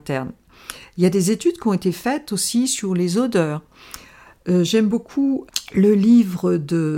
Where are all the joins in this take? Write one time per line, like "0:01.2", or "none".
none